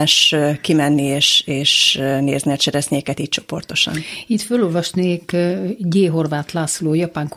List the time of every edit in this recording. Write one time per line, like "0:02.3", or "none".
none